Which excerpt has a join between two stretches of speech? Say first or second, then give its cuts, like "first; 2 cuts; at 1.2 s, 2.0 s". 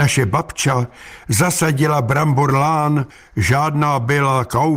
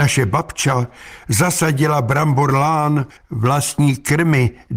second; 1 cut; at 3.2 s